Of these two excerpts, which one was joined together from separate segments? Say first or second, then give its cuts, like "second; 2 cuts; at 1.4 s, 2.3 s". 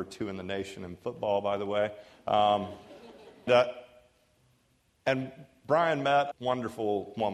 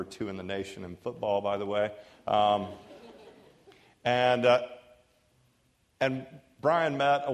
first; 2 cuts; at 3.5 s, 6.3 s